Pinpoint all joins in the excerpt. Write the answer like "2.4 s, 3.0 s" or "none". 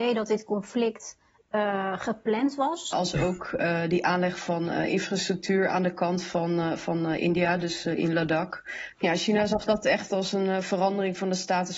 2.9 s, 8.9 s